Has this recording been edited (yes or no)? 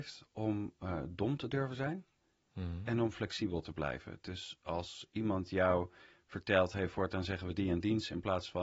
no